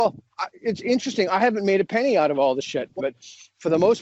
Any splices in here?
yes; 1 cut; at 3.0 s

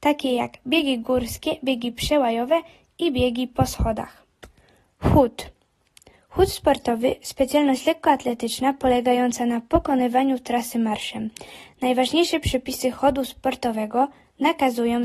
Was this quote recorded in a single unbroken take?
yes; 0 cuts

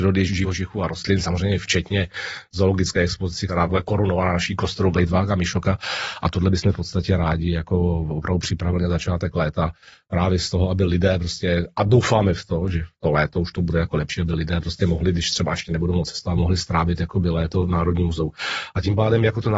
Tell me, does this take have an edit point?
no; 0 cuts

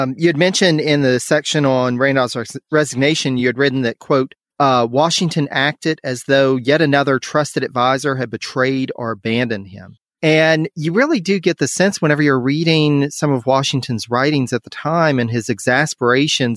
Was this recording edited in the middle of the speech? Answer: no; 0 cuts

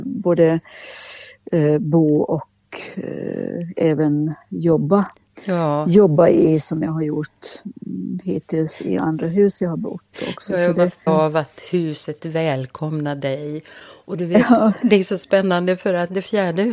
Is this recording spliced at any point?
yes; 1 cut; at 11.1 s

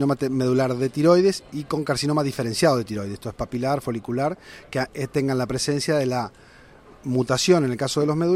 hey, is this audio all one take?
yes; 0 cuts

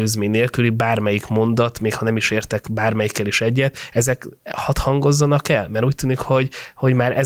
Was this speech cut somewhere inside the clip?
no; 0 cuts

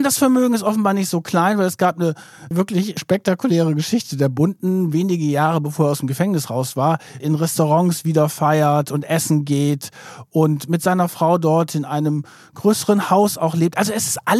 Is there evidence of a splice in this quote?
yes; 2 cuts; at 2.5 s, 7.2 s

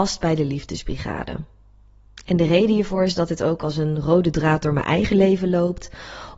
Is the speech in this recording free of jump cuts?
yes; 0 cuts

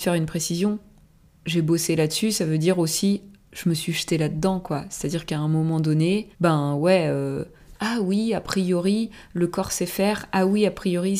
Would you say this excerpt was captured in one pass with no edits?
no; 2 cuts; at 6.3 s, 7.7 s

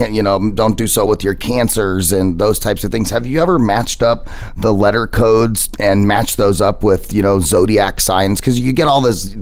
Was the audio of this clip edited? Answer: yes; 1 cut; at 1.1 s

